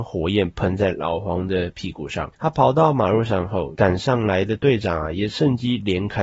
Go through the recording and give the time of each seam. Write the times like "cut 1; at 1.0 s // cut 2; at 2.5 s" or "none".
cut 1; at 2.3 s // cut 2; at 3.7 s